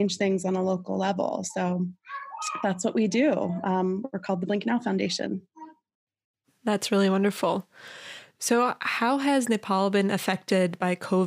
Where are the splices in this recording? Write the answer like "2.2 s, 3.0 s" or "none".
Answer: none